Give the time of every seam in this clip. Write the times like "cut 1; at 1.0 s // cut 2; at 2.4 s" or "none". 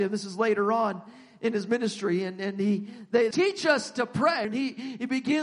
cut 1; at 3.3 s // cut 2; at 4.4 s